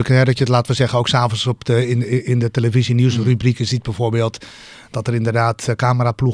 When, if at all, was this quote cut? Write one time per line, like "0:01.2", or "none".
none